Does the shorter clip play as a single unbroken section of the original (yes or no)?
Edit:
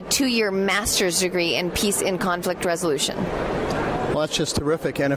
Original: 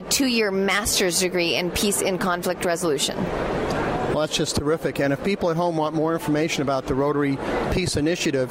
yes